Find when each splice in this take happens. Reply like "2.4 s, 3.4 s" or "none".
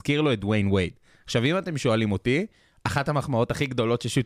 none